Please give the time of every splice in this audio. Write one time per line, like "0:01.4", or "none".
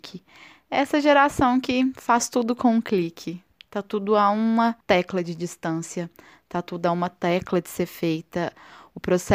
0:04.8